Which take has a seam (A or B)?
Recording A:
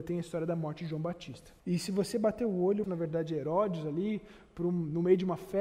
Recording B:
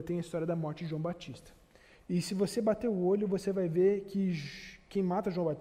A